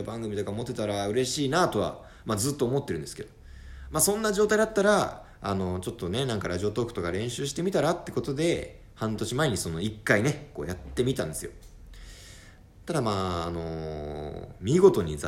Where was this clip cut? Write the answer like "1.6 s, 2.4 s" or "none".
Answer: none